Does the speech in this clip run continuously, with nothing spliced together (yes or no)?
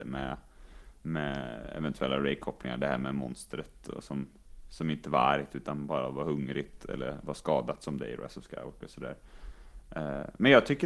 yes